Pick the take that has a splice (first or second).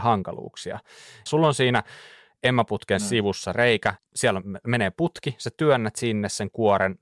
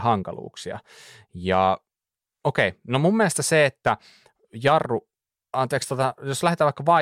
first